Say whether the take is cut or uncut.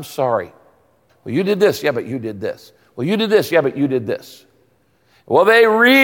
cut